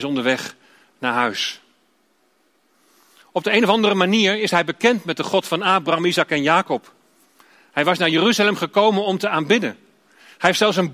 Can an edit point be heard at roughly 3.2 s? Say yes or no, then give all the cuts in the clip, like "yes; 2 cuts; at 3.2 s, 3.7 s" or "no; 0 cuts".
no; 0 cuts